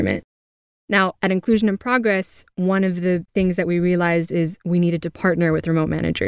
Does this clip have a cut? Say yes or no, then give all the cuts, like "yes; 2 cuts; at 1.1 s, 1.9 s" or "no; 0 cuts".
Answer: no; 0 cuts